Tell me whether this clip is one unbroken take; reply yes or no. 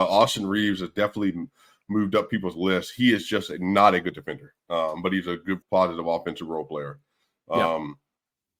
no